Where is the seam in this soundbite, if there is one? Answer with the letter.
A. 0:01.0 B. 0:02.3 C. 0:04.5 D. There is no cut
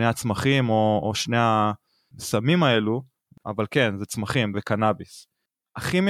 C